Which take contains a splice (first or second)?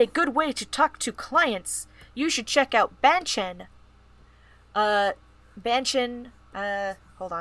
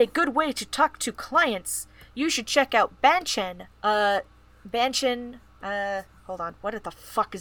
second